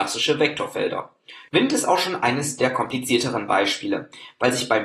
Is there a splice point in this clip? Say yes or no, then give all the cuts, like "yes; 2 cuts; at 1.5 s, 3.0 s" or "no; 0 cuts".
yes; 1 cut; at 1.5 s